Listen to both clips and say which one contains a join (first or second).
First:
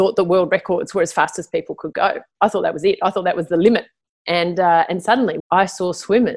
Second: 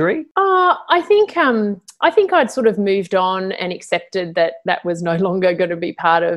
first